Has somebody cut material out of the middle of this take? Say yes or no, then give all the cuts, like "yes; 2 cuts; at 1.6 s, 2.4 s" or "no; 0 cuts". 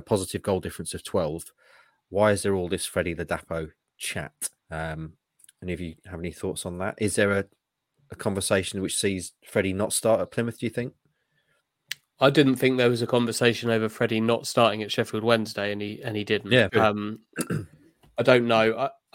yes; 2 cuts; at 4.6 s, 16.7 s